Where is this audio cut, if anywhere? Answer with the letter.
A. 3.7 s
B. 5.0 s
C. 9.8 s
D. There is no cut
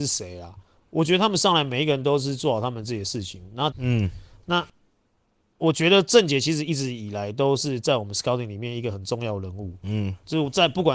A